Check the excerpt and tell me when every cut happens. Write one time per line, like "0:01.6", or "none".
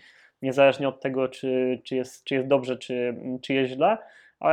none